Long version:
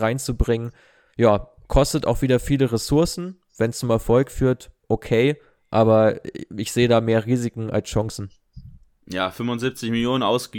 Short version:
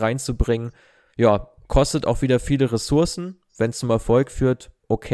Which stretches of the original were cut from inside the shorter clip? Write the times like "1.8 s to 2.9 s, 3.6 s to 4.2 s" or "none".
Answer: none